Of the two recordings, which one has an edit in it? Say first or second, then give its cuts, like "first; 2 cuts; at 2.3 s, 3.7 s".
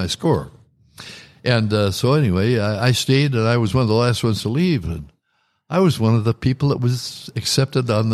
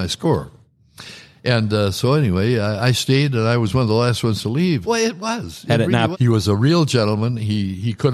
second; 2 cuts; at 4.8 s, 6.1 s